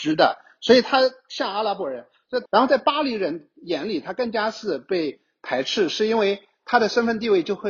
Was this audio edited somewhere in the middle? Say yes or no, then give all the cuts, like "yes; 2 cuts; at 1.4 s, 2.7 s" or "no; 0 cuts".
yes; 1 cut; at 2.5 s